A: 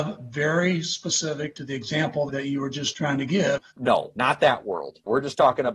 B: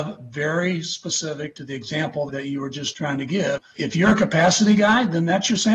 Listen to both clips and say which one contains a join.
A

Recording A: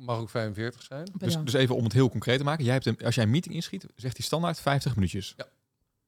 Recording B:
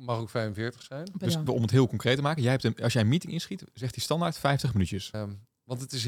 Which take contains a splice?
B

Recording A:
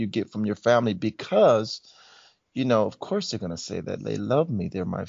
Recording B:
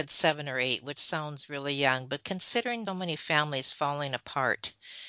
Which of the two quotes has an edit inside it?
B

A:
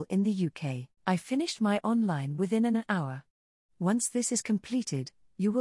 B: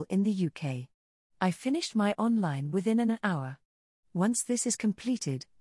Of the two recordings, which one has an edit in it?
A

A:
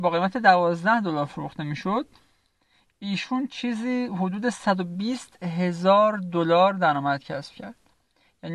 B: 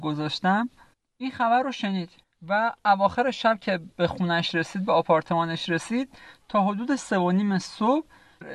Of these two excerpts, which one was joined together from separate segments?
B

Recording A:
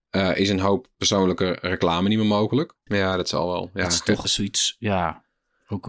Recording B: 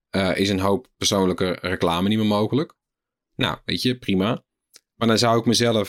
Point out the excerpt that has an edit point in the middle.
A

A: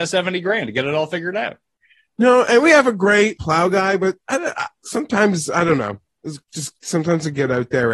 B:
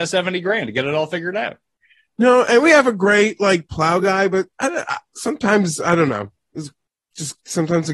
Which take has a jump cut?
A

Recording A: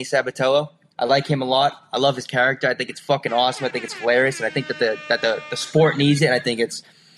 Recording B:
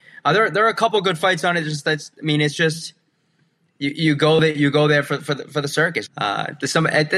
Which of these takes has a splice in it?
B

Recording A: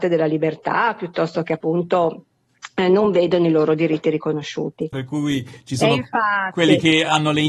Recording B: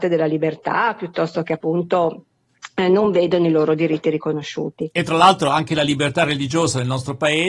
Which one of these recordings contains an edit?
A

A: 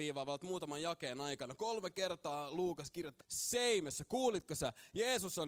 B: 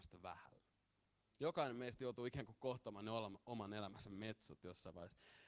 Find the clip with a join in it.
A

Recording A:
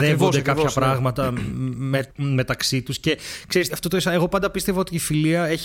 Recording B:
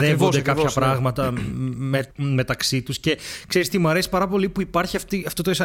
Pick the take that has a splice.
A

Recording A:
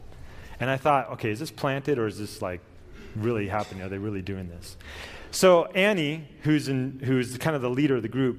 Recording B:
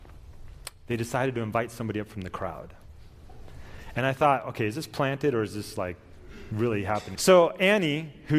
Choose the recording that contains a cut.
B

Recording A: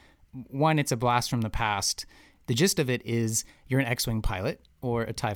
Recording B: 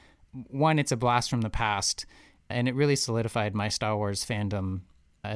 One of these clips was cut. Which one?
A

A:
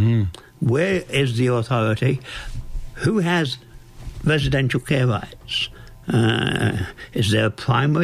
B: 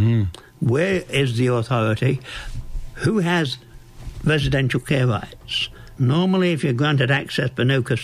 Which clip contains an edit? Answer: B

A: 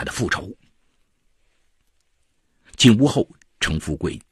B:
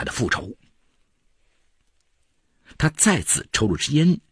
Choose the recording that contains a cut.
A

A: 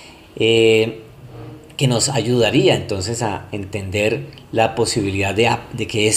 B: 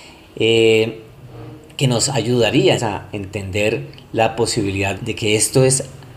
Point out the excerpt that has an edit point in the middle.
B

